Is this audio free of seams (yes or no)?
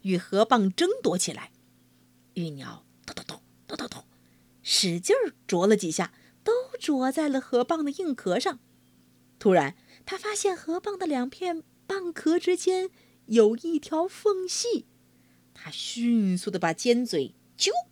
yes